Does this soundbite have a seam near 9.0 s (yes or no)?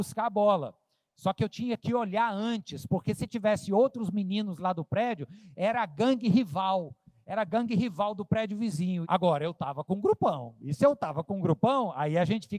yes